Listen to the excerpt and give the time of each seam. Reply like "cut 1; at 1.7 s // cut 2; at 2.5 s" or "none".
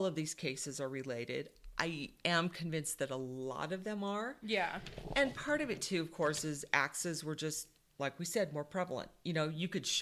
none

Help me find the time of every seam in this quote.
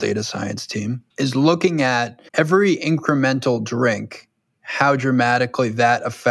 cut 1; at 1.1 s // cut 2; at 2.3 s

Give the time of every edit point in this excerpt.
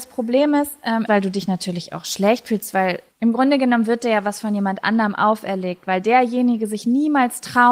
cut 1; at 1.1 s

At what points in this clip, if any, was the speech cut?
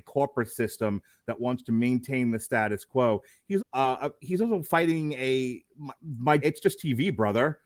cut 1; at 3.6 s // cut 2; at 6.4 s

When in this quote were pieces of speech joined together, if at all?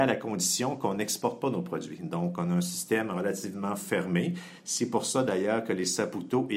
none

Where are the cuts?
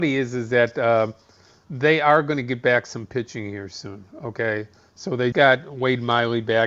cut 1; at 5.3 s

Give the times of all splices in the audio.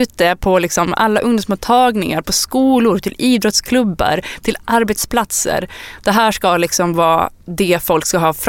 none

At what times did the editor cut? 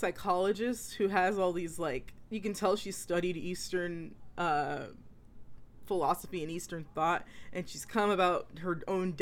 none

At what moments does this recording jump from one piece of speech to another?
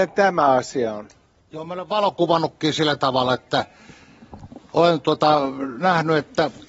none

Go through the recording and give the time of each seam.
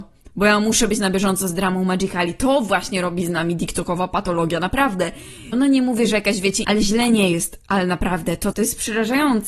cut 1; at 5.5 s // cut 2; at 6.6 s // cut 3; at 8.5 s

